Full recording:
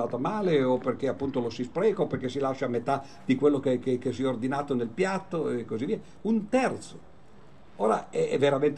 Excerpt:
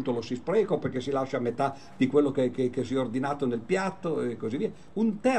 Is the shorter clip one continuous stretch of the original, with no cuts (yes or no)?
yes